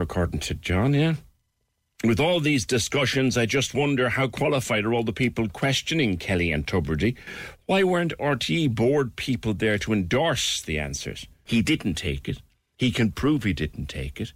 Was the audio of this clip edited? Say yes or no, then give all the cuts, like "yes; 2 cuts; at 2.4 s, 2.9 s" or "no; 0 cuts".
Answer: yes; 1 cut; at 11.5 s